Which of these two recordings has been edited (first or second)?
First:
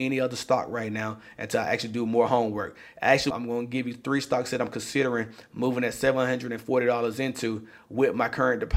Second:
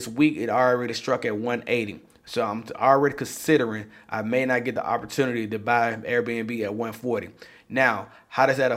first